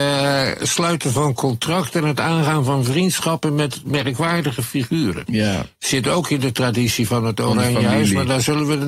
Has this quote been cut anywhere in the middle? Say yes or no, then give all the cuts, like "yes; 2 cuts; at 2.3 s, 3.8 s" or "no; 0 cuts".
no; 0 cuts